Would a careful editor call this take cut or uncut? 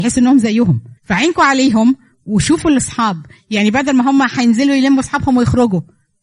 cut